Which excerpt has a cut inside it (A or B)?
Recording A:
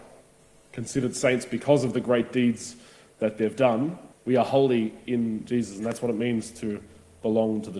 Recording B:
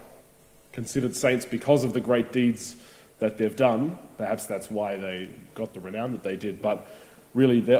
A